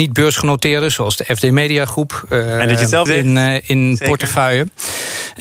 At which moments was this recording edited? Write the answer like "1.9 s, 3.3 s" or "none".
3.1 s